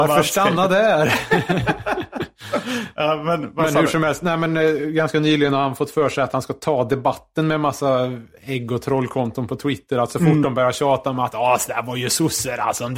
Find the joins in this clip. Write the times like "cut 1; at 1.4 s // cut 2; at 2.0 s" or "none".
none